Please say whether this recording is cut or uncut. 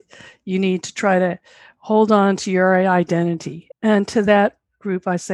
cut